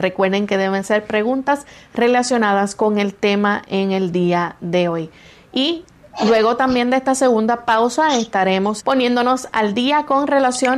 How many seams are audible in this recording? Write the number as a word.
one